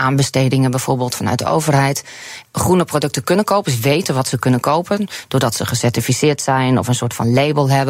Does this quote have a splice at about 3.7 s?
no; 1 cut; at 2.4 s

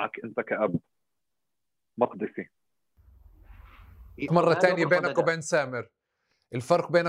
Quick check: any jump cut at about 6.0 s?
no; 1 cut; at 4.3 s

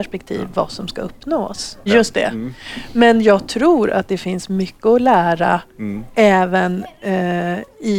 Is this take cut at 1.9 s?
yes; 1 cut; at 1.9 s

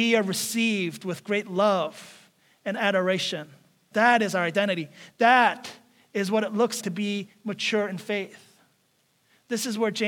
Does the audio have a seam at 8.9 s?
no; 2 cuts; at 3.9 s, 6.8 s

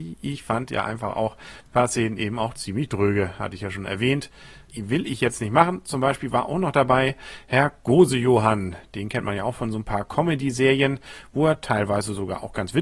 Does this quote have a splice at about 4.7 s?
yes; 1 cut; at 4.7 s

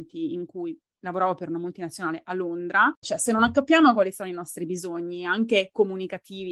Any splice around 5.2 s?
no; 1 cut; at 3.0 s

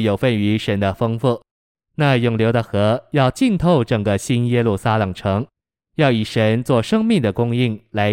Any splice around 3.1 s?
no; 2 cuts; at 1.7 s, 5.8 s

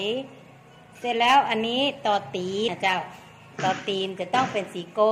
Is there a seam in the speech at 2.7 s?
yes; 1 cut; at 2.7 s

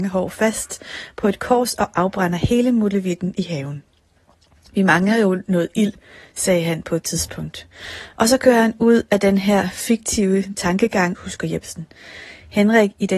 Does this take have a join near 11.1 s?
yes; 1 cut; at 11.1 s

